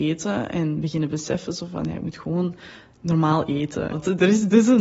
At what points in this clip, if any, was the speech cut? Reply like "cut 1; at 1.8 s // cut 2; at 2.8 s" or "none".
cut 1; at 3.9 s